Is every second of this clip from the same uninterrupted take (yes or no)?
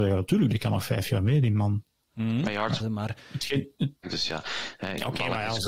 no